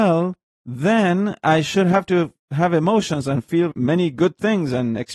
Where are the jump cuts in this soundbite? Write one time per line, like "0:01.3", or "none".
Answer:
0:03.7